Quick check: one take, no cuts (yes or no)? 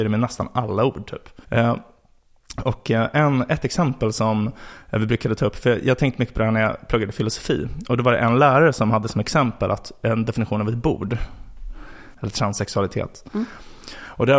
no